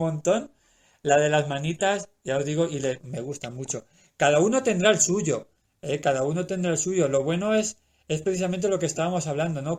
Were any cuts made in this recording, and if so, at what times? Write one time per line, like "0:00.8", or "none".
0:03.0